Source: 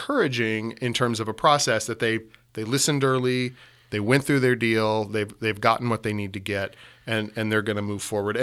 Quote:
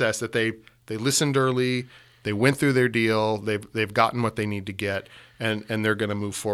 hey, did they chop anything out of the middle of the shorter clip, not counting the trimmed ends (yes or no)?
no